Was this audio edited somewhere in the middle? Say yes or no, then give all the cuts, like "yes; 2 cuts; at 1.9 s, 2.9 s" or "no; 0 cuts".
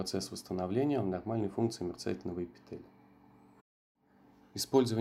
no; 0 cuts